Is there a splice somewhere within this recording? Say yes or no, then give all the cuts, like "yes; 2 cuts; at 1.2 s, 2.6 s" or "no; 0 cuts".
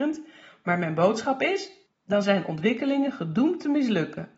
yes; 1 cut; at 1.9 s